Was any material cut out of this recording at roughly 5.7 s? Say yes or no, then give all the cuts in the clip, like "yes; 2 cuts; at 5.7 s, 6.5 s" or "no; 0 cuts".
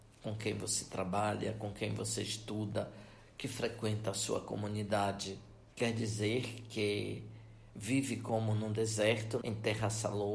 yes; 2 cuts; at 5.7 s, 9.4 s